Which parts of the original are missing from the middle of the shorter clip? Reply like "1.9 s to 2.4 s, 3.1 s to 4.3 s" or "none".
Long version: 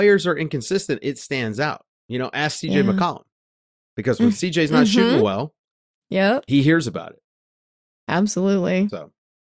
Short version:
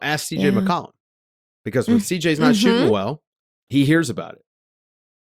6.0 s to 6.4 s